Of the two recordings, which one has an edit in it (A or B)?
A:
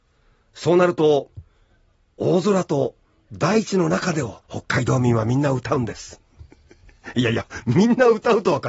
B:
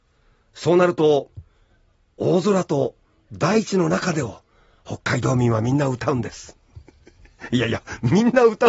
A